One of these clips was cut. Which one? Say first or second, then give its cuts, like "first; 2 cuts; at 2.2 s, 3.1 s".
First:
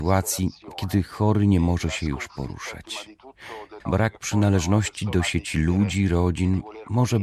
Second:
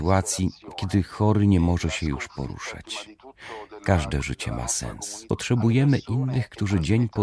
first; 1 cut; at 3.8 s